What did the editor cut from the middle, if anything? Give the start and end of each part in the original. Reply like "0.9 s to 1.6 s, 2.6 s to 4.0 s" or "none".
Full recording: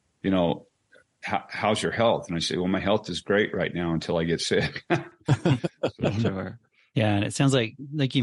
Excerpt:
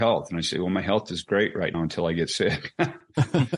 3.7 s to 3.8 s